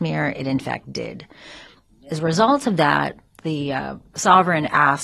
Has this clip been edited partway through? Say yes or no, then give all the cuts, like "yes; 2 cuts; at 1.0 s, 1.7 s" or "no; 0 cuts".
no; 0 cuts